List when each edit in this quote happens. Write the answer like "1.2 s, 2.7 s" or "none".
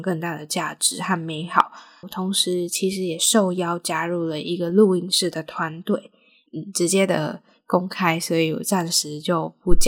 2.0 s, 6.5 s